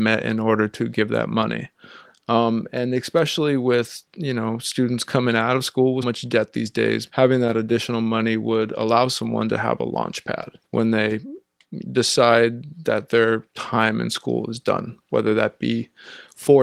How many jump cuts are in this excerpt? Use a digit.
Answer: 3